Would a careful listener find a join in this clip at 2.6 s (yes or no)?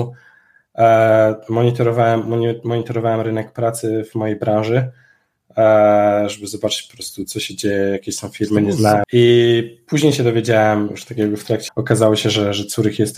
no